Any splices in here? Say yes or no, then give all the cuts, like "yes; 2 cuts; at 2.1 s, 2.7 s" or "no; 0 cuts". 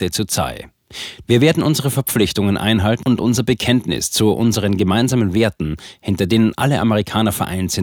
yes; 1 cut; at 1.2 s